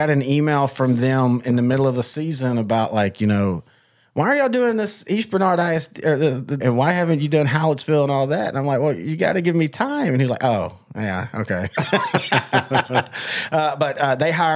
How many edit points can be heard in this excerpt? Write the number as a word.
one